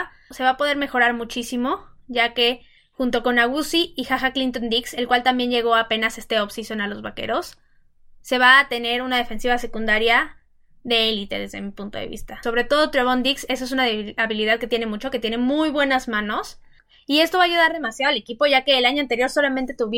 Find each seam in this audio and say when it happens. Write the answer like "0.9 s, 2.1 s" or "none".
12.4 s

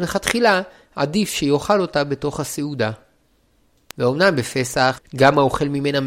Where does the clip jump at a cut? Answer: 3.9 s, 4.9 s

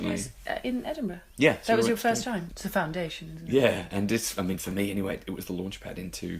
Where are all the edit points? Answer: 2.5 s

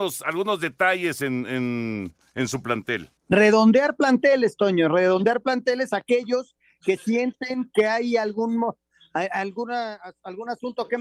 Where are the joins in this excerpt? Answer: 3.2 s

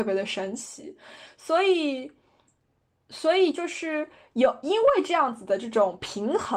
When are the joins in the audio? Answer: none

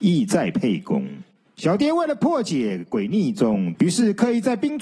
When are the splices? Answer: 1.5 s, 3.7 s

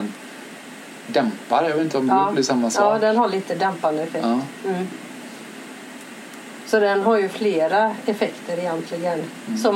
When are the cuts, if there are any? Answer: none

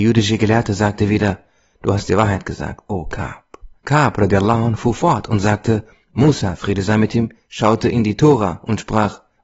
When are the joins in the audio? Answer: 3.8 s

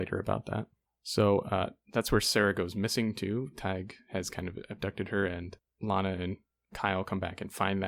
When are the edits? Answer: none

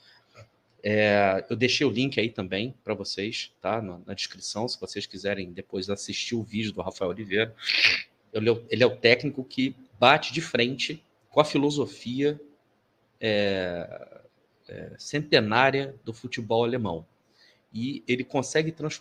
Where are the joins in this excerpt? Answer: 8.2 s, 11.2 s

